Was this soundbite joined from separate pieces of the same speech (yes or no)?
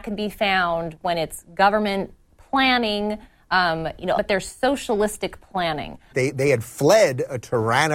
yes